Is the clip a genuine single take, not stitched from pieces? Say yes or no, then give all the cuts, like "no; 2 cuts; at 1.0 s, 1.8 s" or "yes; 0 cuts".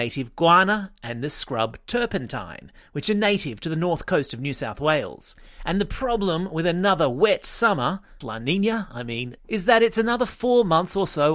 no; 2 cuts; at 8.2 s, 9.4 s